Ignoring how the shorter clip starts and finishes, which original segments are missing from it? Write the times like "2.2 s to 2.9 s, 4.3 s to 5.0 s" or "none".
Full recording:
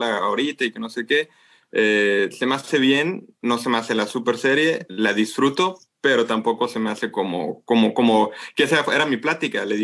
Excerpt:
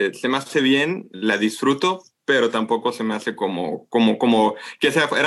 3.3 s to 4.9 s